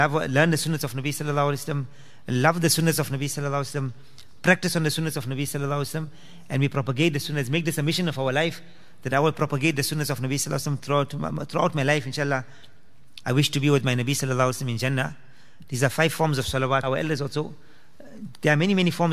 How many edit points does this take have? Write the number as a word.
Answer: two